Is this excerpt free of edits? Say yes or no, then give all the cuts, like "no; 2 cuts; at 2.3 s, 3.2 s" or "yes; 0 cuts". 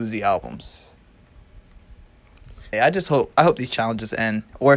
no; 1 cut; at 2.7 s